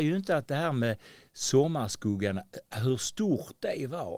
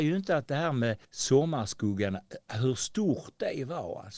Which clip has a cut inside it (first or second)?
second